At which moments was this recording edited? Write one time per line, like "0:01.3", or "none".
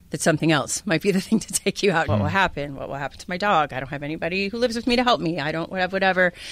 0:02.1